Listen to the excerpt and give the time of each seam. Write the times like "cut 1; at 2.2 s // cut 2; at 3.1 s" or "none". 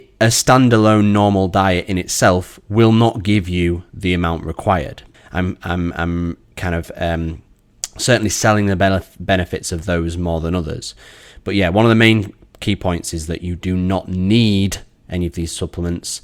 cut 1; at 5.1 s